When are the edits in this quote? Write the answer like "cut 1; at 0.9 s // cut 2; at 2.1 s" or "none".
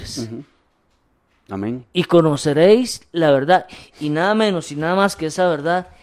none

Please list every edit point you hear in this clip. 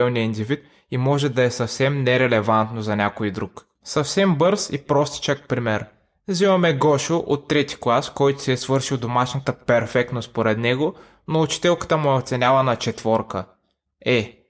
none

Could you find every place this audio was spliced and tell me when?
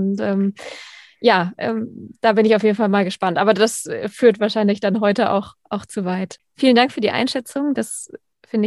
none

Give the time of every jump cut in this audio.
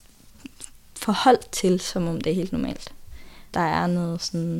cut 1; at 3.5 s

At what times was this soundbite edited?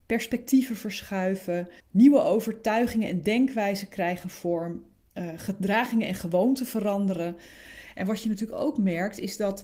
cut 1; at 1.8 s // cut 2; at 7.9 s

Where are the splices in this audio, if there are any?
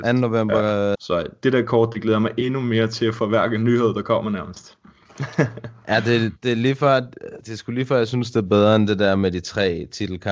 cut 1; at 1.0 s

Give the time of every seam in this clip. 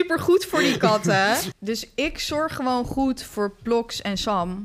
none

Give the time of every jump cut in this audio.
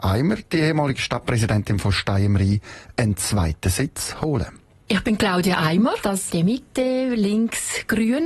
cut 1; at 6.0 s

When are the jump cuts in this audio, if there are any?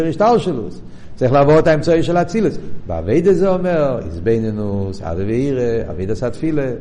cut 1; at 2.8 s

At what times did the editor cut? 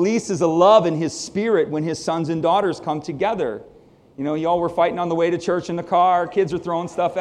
none

